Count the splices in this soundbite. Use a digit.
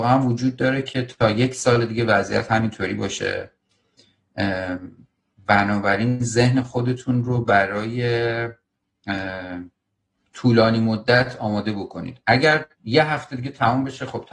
1